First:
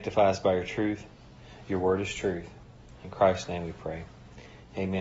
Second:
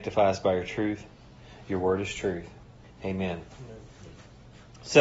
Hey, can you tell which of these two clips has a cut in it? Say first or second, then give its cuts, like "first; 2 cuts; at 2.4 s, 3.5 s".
second; 1 cut; at 2.8 s